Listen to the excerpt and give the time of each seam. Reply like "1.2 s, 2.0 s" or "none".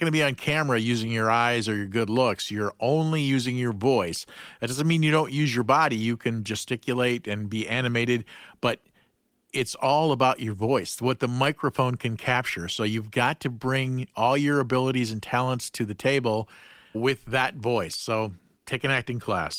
16.9 s